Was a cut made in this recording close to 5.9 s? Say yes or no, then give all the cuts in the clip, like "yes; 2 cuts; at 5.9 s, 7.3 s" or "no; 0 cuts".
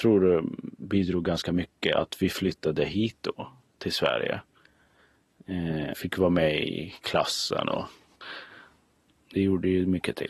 yes; 1 cut; at 5.9 s